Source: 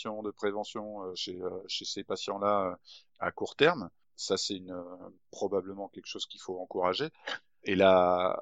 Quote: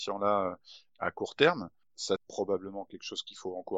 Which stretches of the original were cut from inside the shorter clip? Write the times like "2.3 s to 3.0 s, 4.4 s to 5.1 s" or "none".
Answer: 4.4 s to 5.2 s

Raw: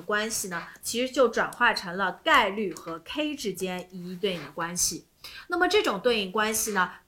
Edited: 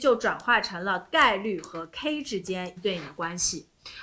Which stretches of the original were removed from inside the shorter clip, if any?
3.9 s to 4.1 s

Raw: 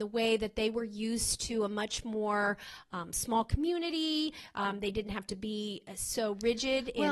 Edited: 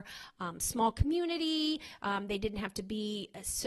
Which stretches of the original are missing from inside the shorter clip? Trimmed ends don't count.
none

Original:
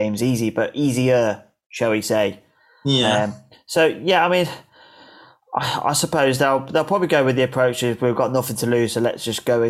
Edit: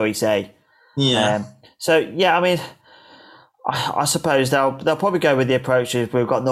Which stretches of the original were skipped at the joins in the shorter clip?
none

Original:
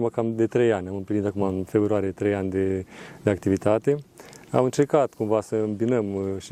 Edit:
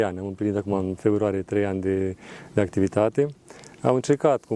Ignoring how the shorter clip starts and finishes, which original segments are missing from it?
none

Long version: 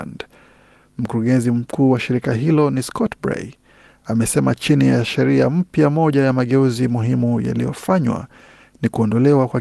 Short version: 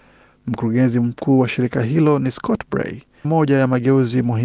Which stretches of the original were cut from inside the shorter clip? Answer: 3.8 s to 5.9 s

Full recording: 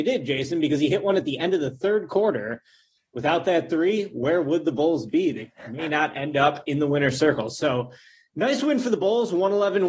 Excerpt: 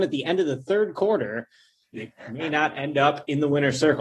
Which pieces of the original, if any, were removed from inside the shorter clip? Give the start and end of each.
3.1 s to 5.3 s

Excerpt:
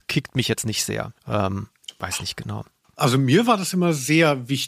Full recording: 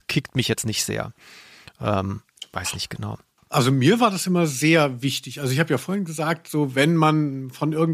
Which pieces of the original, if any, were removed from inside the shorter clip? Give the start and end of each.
1.2 s to 1.7 s

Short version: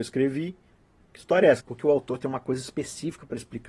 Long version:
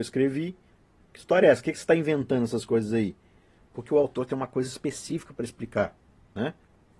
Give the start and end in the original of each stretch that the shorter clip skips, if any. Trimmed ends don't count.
1.6 s to 3.7 s

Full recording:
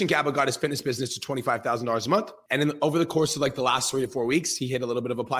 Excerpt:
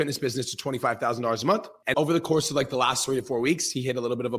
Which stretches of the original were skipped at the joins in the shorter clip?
2.6 s to 2.8 s

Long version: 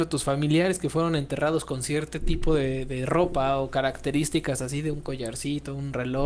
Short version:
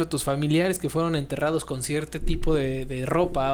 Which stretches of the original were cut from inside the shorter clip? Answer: none

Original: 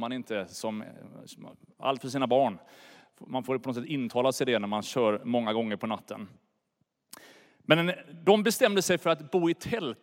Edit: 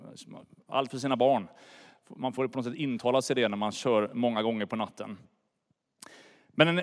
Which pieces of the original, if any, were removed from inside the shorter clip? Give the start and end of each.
none

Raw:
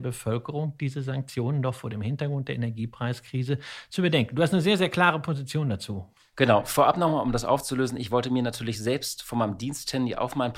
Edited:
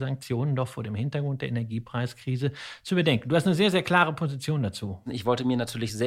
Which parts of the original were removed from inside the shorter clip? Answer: 6.1 s to 7.9 s

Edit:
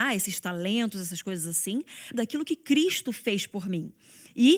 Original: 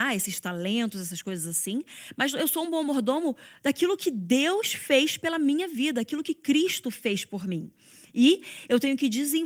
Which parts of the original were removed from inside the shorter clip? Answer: 2.1 s to 5.9 s

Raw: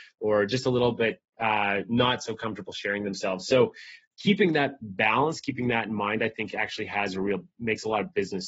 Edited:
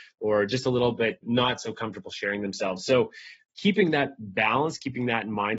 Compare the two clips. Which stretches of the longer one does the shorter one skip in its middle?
1.2 s to 1.8 s

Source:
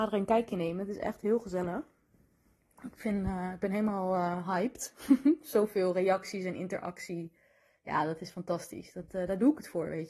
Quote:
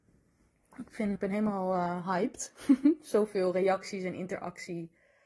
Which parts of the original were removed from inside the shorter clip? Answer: 3.2 s to 3.6 s

